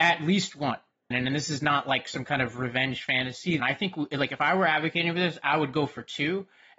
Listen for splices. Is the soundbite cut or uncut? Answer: cut